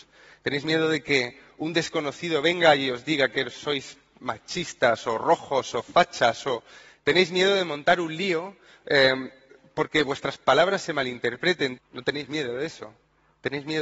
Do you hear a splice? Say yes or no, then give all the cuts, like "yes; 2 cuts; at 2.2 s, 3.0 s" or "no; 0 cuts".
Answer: yes; 1 cut; at 11.8 s